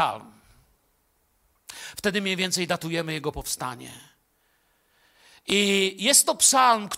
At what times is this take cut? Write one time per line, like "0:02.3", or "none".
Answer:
0:01.9